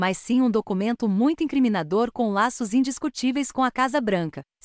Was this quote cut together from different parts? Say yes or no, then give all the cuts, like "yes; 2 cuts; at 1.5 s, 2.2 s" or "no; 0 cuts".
no; 0 cuts